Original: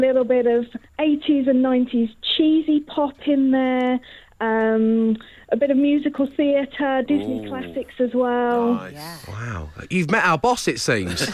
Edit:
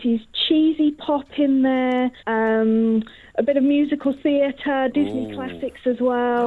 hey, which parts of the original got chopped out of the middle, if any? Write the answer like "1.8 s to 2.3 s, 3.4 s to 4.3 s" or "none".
4.1 s to 4.3 s